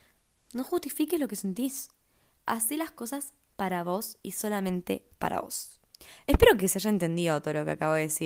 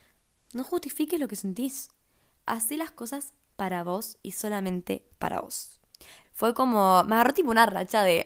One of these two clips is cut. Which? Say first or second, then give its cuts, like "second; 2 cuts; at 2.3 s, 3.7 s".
second; 1 cut; at 6.2 s